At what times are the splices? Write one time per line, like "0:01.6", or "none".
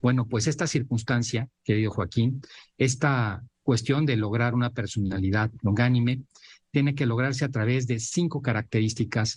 0:03.5